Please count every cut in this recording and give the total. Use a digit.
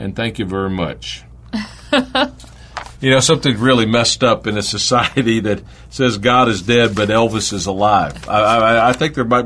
0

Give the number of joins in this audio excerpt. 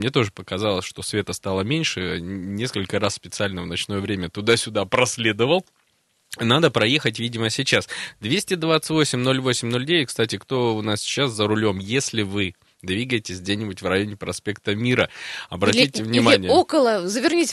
0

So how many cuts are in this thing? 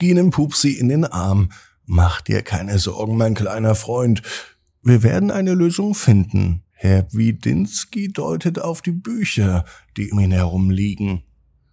2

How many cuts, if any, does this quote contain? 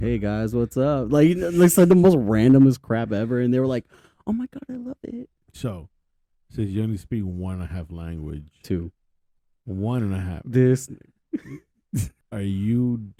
0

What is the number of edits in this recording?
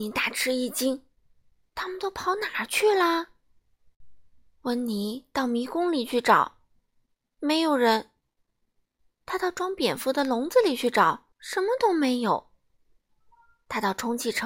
2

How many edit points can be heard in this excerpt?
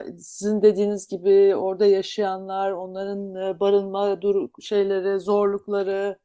0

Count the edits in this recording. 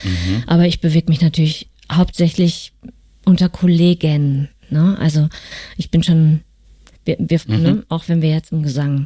1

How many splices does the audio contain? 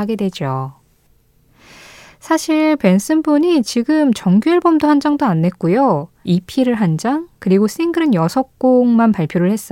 1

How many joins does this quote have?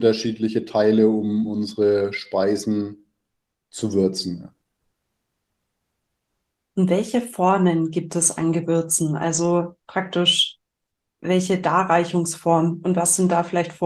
0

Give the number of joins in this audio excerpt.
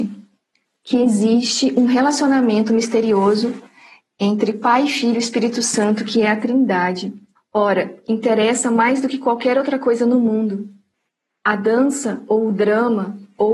1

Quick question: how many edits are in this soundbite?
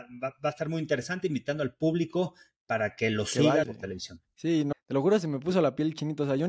2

